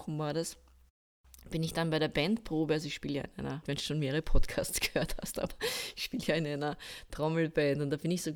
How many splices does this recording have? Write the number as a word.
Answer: one